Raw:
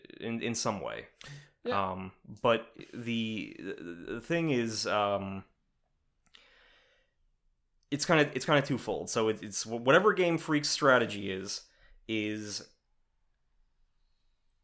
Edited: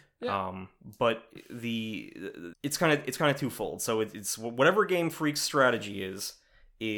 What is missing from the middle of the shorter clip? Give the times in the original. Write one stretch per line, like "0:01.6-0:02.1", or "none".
0:04.0-0:07.8